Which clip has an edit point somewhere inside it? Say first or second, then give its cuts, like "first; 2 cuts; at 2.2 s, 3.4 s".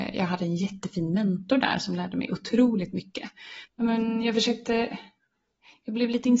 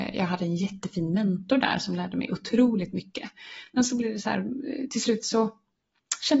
first; 1 cut; at 3.7 s